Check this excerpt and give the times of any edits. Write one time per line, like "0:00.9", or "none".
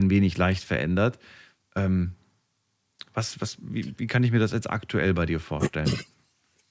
none